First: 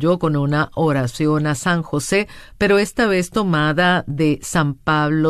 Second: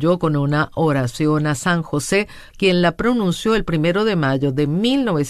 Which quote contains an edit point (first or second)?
second